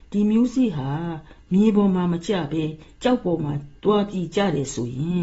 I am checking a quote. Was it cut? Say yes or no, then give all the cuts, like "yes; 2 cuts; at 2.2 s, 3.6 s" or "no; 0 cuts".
yes; 1 cut; at 3.8 s